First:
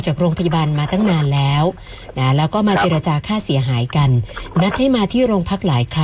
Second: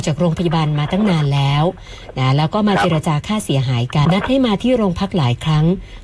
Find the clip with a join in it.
second; 1 cut; at 4.1 s

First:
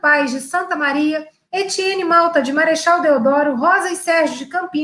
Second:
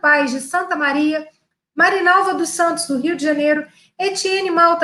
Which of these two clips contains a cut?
first; 1 cut; at 1.5 s

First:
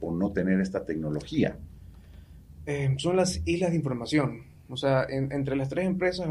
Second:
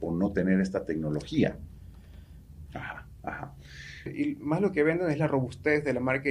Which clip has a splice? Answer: second; 2 cuts; at 2.7 s, 4.1 s

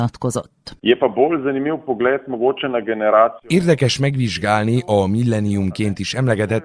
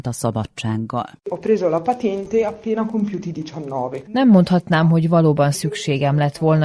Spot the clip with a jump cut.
second; 1 cut; at 4.0 s

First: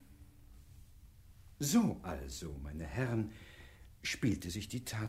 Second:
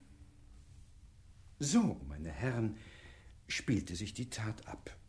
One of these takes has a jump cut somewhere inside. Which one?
second; 1 cut; at 2.0 s

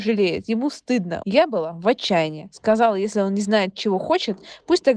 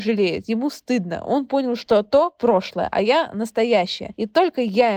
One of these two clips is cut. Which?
first; 1 cut; at 1.2 s

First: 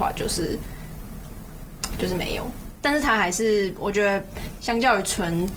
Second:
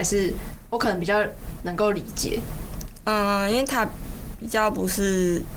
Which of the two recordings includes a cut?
first; 1 cut; at 2.8 s

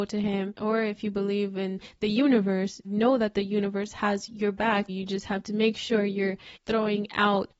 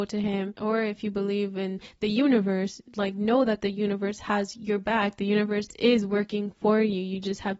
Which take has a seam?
first; 2 cuts; at 2.8 s, 4.9 s

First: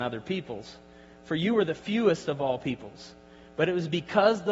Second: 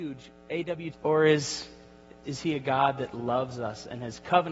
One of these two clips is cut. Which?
second; 2 cuts; at 0.9 s, 2.2 s

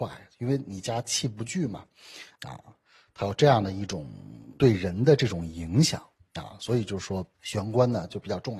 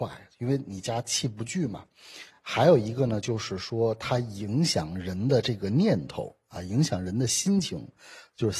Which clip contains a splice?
first; 1 cut; at 2.4 s

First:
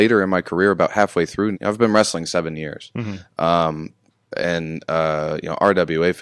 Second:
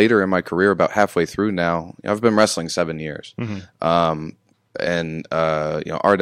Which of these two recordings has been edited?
first; 1 cut; at 1.5 s

